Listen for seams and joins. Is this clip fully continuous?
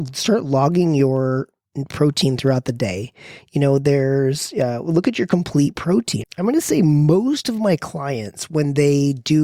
no; 1 cut; at 6.2 s

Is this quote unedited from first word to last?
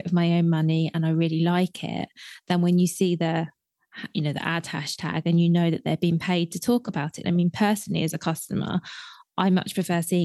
no; 1 cut; at 7.2 s

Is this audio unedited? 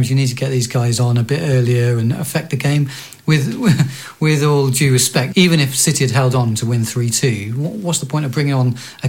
no; 1 cut; at 5.3 s

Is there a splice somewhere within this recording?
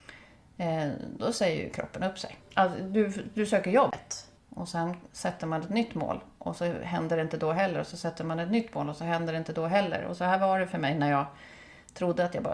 yes; 2 cuts; at 2.4 s, 4.4 s

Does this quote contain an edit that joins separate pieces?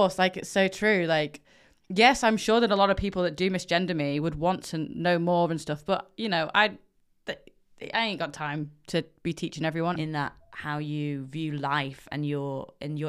yes; 1 cut; at 10.0 s

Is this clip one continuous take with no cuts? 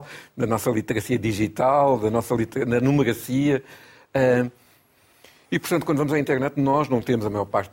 yes; 0 cuts

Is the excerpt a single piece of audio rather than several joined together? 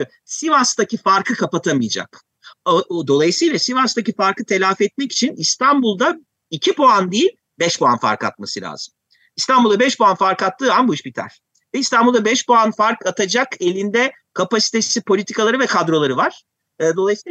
yes; 0 cuts

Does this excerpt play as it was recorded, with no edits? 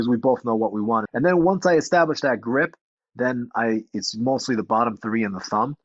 no; 1 cut; at 1.1 s

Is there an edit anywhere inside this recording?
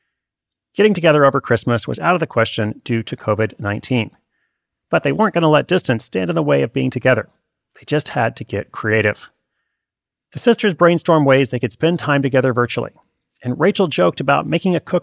no; 0 cuts

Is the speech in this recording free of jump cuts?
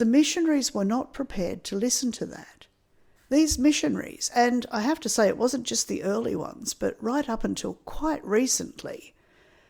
no; 1 cut; at 3.2 s

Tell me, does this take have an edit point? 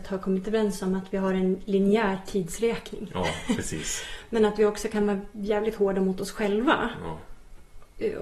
no; 0 cuts

